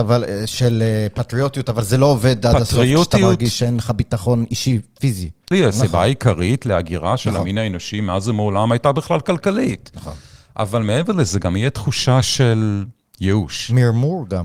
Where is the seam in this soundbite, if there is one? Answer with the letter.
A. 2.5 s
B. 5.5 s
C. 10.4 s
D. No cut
B